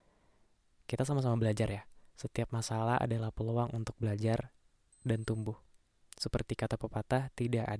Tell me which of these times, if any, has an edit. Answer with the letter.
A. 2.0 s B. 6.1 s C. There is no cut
C